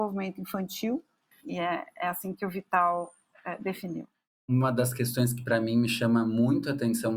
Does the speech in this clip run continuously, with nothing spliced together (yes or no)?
no